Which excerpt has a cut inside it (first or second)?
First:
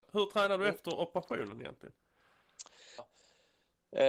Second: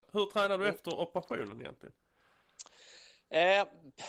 first